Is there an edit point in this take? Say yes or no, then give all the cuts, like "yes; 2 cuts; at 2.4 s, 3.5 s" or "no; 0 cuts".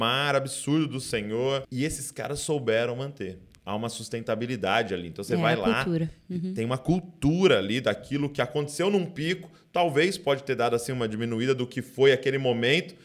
yes; 1 cut; at 1.6 s